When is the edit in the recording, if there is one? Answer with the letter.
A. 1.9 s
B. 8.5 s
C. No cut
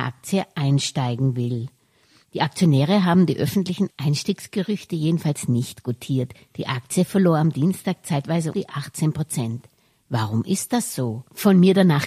B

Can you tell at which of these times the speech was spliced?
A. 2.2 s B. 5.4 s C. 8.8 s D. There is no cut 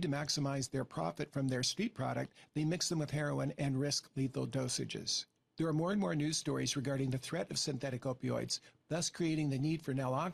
C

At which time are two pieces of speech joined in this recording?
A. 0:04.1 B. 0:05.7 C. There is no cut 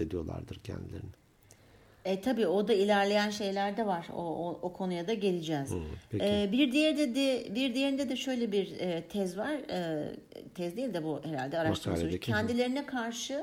C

